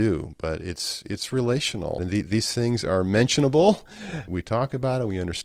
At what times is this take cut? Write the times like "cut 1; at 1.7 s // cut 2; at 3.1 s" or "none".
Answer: cut 1; at 2.0 s // cut 2; at 4.3 s